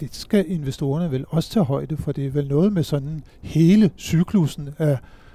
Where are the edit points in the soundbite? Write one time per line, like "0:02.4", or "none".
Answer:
0:02.0